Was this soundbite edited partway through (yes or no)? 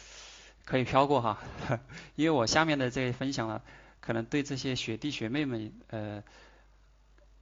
no